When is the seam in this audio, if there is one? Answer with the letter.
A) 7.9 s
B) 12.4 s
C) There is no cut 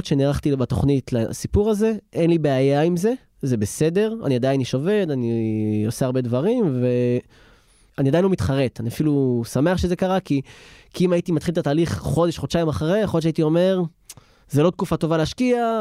A